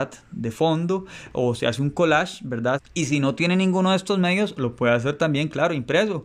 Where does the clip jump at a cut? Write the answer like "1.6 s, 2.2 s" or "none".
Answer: 2.8 s